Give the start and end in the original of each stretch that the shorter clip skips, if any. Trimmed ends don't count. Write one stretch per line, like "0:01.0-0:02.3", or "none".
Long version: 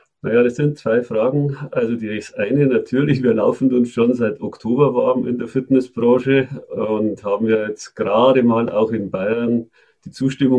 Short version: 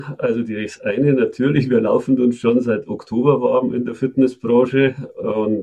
none